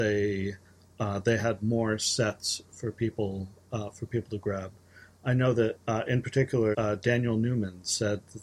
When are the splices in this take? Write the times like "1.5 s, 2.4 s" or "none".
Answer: 6.7 s